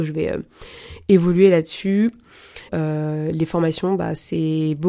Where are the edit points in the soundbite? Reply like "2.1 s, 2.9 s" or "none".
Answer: 2.7 s